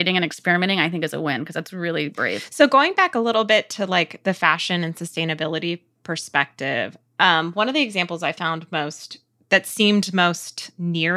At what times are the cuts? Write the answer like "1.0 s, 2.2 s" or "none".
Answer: none